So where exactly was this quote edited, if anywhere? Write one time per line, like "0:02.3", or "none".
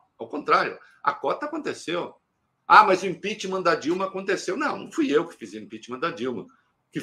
none